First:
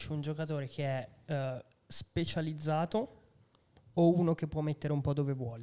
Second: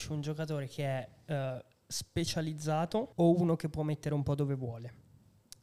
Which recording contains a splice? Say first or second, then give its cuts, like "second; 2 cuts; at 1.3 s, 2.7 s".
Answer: second; 1 cut; at 3.1 s